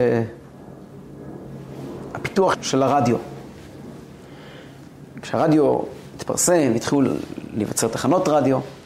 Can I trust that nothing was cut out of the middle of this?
no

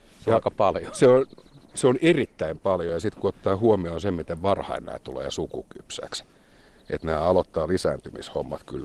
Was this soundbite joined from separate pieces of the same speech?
no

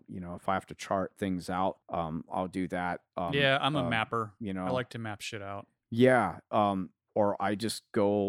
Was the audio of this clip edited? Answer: yes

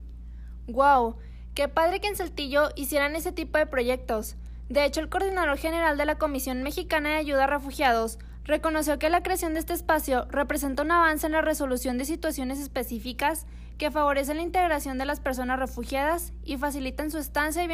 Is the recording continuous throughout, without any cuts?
no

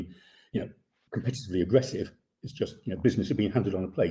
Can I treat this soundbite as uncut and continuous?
yes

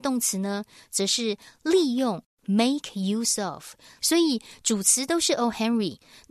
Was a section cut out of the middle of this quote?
yes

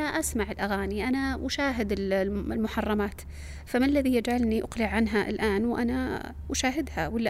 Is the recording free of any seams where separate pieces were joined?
yes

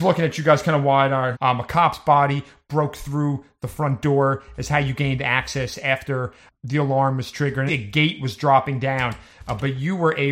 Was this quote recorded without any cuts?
no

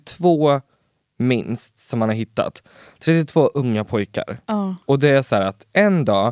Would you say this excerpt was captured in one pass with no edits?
yes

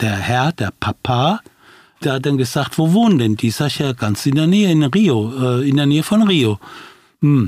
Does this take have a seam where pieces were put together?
yes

